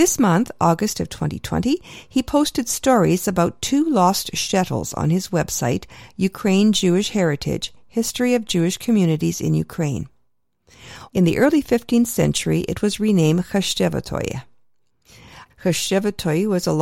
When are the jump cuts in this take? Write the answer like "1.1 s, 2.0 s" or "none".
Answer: 11.1 s, 15.5 s